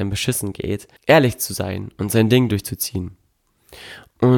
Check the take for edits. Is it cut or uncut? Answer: cut